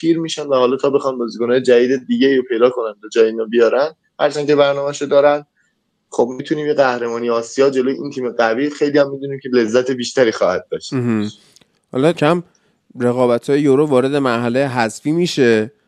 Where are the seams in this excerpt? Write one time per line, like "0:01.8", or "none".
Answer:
0:12.1